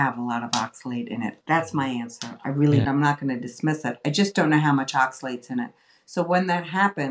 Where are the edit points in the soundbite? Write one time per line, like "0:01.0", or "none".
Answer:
0:01.4
0:02.8